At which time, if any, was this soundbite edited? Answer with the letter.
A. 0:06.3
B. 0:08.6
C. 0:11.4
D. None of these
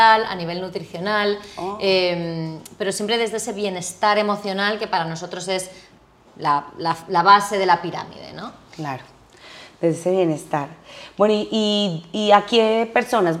D